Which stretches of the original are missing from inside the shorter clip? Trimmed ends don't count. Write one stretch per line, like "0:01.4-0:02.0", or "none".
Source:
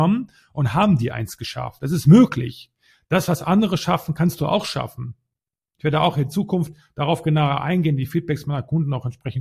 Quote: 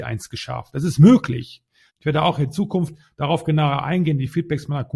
0:03.0-0:05.7